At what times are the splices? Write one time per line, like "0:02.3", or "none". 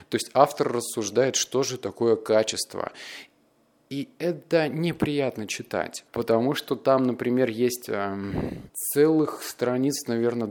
0:06.1
0:08.7

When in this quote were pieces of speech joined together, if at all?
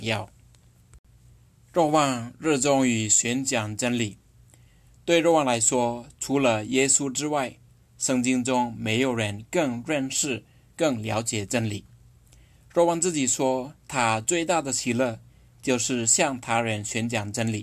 none

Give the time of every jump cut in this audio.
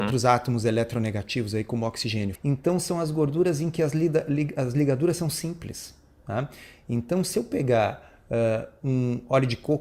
0:02.4

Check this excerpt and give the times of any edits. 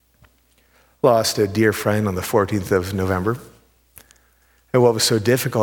none

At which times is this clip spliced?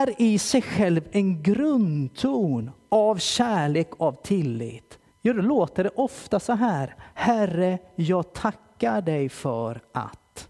0:05.1

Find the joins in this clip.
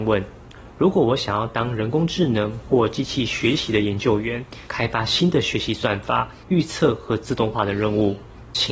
0:04.7
0:06.4

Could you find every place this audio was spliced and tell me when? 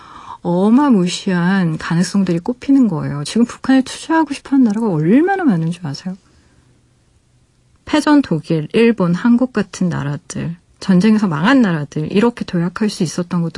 none

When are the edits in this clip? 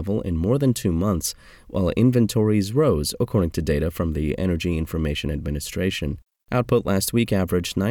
none

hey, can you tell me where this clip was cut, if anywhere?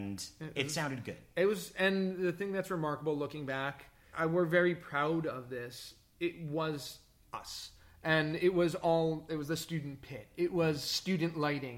0:04.1

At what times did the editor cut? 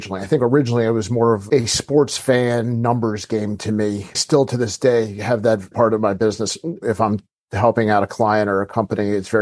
0:05.7

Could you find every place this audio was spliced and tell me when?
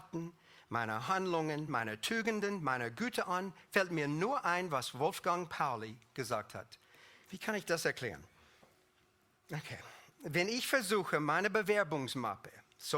0:01.7
0:07.2

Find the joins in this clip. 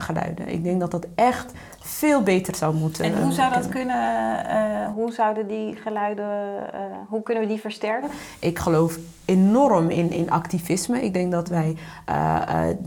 none

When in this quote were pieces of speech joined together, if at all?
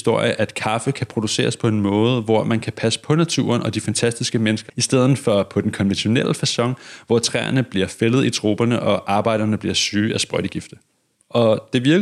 0:04.7

